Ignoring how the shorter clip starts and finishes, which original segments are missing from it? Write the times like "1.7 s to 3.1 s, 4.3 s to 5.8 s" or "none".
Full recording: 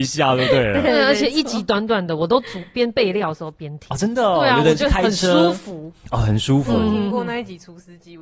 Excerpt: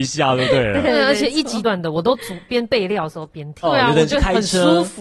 1.6 s to 1.9 s, 3.9 s to 4.3 s